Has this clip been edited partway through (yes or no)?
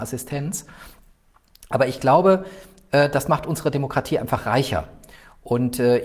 no